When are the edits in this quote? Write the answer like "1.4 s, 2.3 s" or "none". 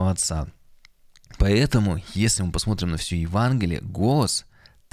none